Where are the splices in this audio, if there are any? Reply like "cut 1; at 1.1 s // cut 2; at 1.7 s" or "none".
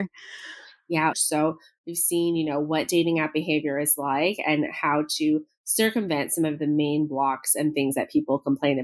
cut 1; at 1.1 s